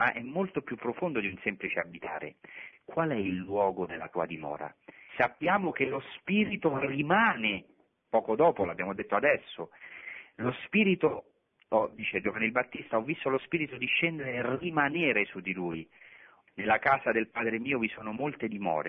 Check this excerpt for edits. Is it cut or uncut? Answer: cut